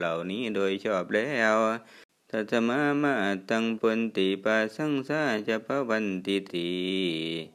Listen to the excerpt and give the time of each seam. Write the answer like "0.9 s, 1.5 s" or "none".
3.8 s, 6.5 s